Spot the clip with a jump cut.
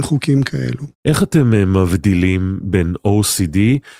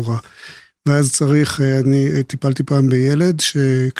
first; 1 cut; at 0.9 s

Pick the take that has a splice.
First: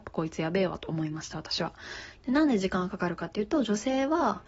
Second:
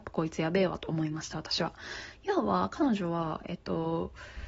first; 1 cut; at 2.2 s

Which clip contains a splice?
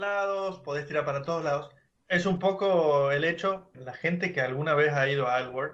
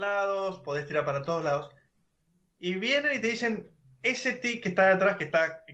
first; 2 cuts; at 2.0 s, 3.7 s

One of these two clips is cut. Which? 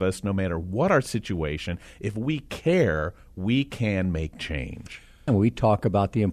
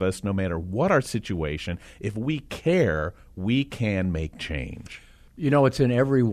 first; 1 cut; at 5.3 s

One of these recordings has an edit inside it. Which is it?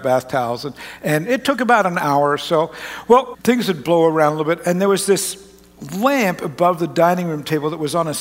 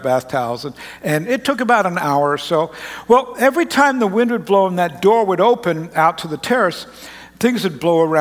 first; 1 cut; at 3.3 s

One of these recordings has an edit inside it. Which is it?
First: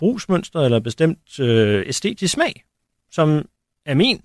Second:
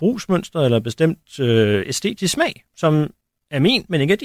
second; 1 cut; at 2.7 s

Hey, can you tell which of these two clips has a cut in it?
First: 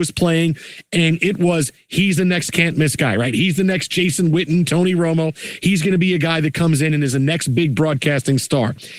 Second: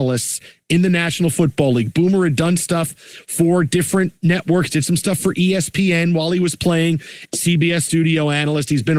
second; 1 cut; at 7.3 s

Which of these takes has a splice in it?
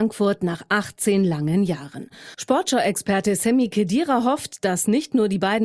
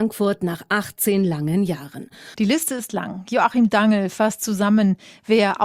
second; 1 cut; at 2.3 s

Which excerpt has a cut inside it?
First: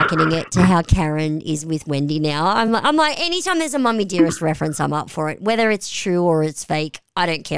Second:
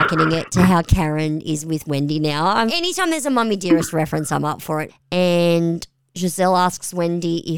second; 2 cuts; at 2.7 s, 4.9 s

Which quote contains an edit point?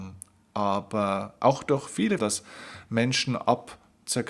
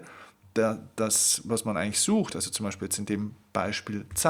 first; 1 cut; at 2.2 s

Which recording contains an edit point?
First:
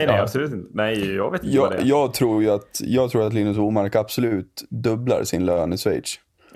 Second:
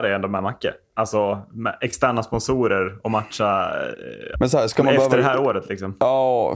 second; 1 cut; at 4.3 s

